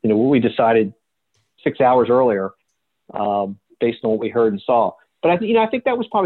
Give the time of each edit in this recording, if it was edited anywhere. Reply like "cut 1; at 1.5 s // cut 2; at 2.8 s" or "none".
none